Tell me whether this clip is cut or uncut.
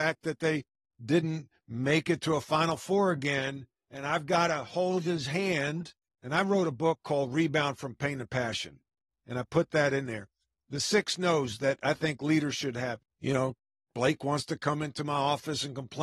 cut